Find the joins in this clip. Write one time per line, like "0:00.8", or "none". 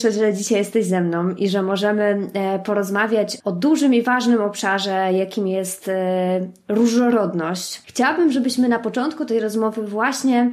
0:03.4
0:07.8